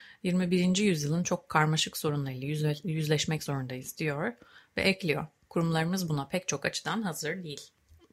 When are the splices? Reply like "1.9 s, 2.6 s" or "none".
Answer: none